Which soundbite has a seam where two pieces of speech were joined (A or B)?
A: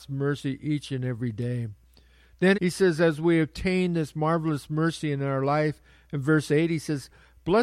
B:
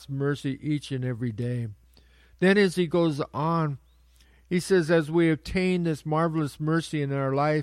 A